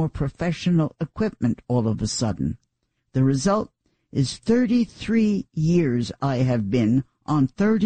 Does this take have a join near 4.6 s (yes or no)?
no